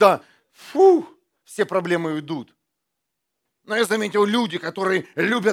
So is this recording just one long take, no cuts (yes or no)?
yes